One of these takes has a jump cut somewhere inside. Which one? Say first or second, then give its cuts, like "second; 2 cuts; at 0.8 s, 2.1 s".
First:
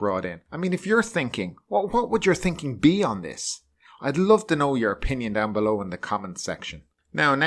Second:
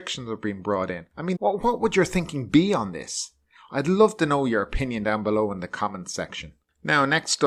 second; 1 cut; at 1.4 s